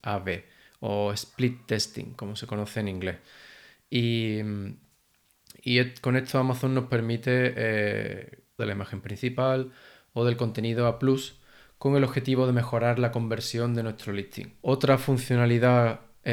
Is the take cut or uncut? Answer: cut